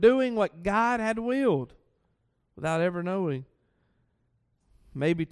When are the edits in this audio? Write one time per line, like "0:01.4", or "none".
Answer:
none